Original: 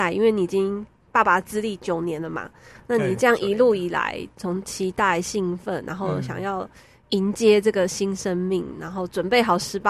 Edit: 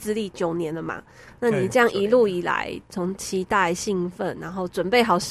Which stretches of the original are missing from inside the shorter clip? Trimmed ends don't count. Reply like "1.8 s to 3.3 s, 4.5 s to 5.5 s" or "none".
5.8 s to 8.8 s